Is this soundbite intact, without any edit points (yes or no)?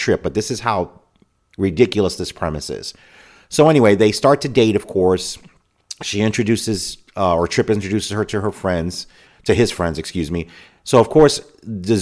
yes